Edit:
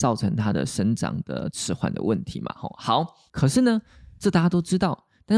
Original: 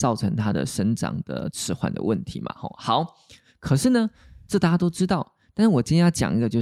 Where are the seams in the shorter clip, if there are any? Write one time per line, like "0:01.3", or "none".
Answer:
0:03.3

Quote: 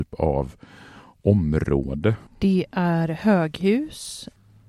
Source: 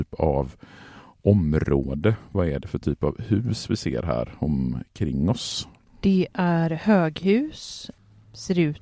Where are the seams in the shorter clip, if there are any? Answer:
0:02.3

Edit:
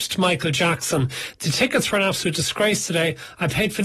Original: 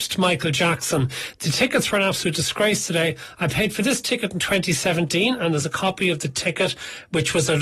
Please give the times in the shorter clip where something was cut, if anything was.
none

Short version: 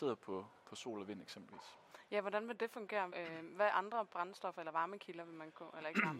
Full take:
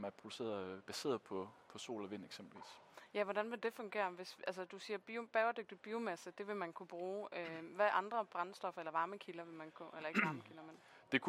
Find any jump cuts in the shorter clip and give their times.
0:03.1

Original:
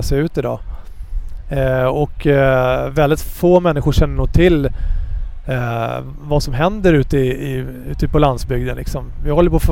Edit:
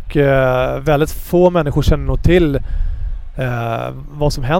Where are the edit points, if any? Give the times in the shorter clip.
none

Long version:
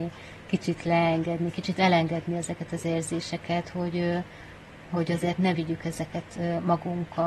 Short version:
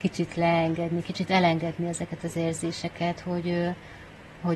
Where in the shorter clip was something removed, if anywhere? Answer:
none

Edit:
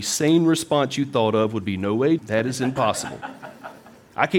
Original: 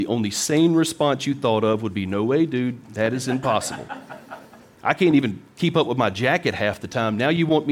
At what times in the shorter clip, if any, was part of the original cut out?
0:02.2

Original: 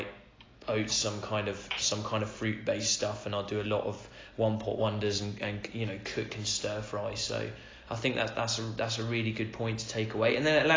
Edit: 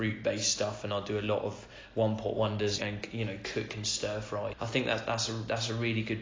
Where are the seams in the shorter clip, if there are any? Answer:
0:02.8
0:04.5

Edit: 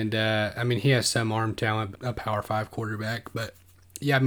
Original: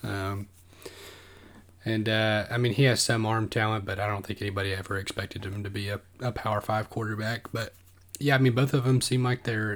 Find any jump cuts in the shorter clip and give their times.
0:01.9

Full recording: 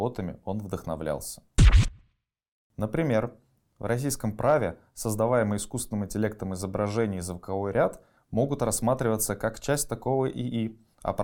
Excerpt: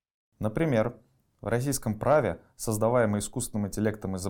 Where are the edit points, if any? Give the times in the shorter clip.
none

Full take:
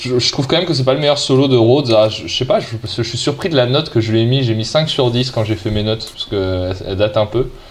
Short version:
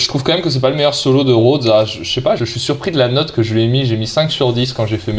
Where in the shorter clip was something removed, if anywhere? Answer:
0:02.4

